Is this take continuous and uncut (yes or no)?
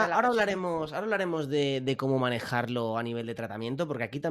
yes